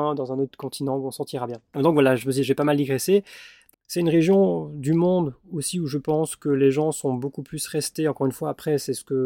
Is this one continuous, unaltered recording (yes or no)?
no